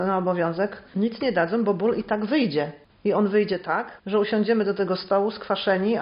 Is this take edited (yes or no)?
yes